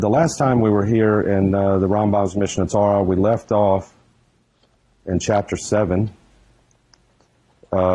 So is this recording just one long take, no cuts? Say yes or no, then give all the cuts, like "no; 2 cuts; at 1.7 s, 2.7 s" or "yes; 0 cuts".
yes; 0 cuts